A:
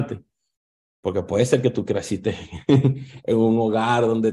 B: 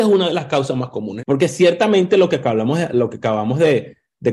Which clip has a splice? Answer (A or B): B